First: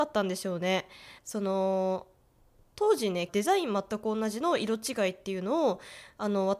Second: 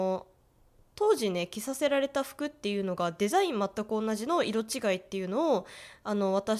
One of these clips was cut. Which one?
first; 2 cuts; at 1.2 s, 3.3 s

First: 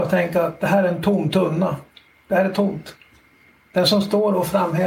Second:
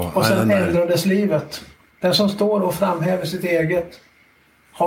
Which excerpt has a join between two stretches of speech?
second; 1 cut; at 1.9 s

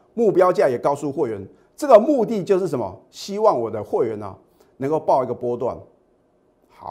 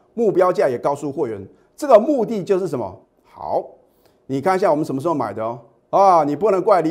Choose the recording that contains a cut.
second; 1 cut; at 3.0 s

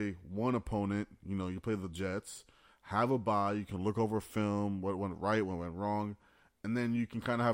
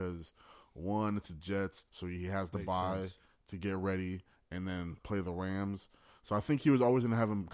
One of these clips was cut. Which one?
second; 1 cut; at 1.9 s

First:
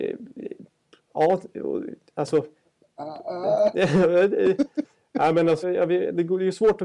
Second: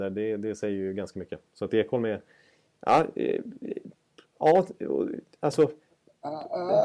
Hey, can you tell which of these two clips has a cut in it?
first; 1 cut; at 5.6 s

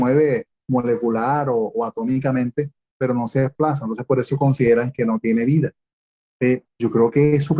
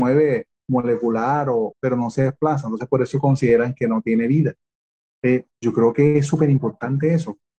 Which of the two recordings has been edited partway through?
second; 1 cut; at 1.7 s

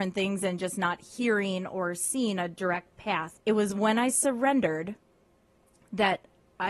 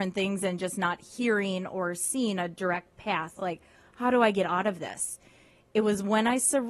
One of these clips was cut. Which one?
first; 1 cut; at 3.4 s

